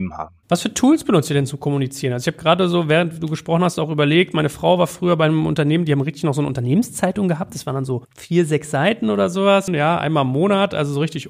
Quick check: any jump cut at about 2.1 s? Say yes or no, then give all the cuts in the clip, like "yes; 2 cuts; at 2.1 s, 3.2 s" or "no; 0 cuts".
no; 1 cut; at 9.7 s